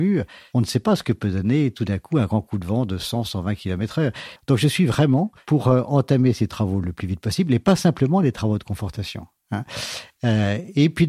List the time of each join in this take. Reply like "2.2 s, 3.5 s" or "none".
4.4 s